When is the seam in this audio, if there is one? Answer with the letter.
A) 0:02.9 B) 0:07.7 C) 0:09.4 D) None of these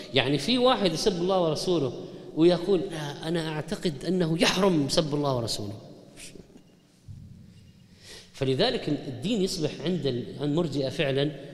A